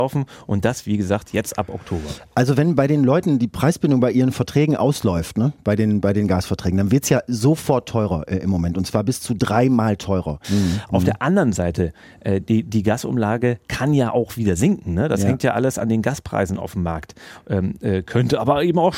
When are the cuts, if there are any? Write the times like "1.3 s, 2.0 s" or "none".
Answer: 10.4 s